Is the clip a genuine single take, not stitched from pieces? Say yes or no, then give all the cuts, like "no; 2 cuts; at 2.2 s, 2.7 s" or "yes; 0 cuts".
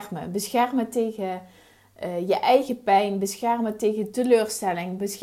yes; 0 cuts